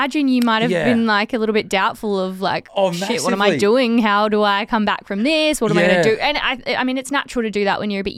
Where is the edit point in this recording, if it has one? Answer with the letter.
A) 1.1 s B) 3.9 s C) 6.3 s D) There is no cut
D